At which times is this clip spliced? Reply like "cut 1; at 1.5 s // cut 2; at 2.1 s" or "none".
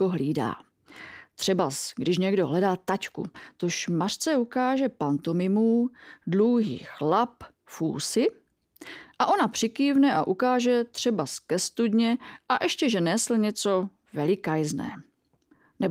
none